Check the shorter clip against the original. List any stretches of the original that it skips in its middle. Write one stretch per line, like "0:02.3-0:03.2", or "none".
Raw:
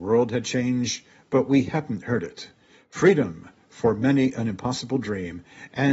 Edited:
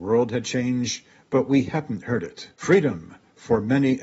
0:02.5-0:02.9